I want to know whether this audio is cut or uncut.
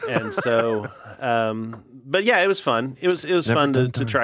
uncut